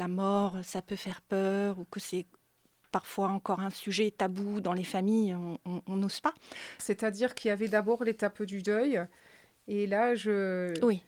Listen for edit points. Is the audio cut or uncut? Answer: cut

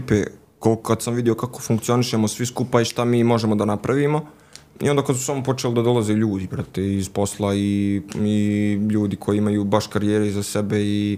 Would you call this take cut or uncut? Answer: uncut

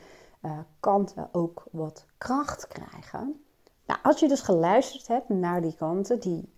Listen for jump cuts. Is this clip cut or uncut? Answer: cut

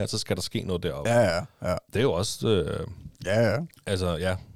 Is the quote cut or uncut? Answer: cut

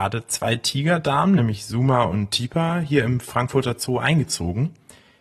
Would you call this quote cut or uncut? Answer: uncut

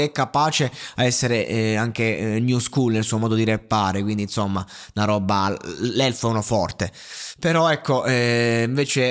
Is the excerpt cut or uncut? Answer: uncut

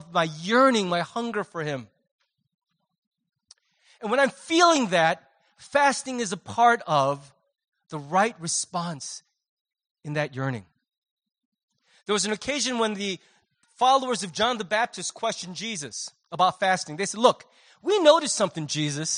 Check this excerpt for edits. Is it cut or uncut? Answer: uncut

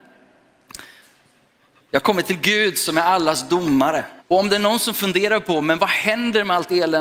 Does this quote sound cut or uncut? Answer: cut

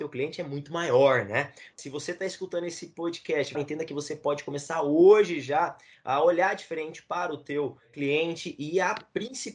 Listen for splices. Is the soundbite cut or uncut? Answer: cut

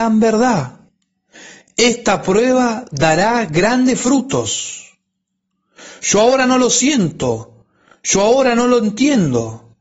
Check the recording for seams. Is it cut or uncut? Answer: uncut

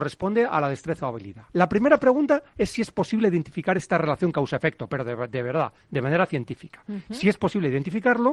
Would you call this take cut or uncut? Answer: cut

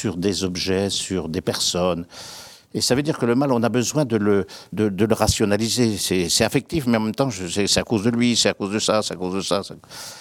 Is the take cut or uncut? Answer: cut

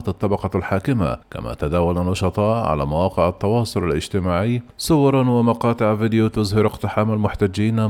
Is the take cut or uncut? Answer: cut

